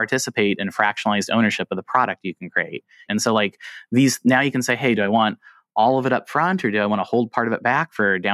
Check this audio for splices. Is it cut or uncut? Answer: cut